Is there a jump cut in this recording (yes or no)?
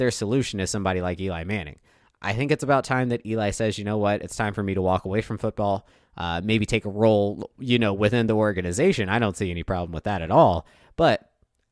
no